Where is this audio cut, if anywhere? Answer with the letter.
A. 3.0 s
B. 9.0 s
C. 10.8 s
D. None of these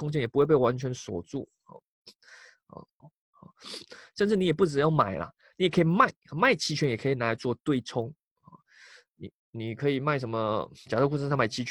A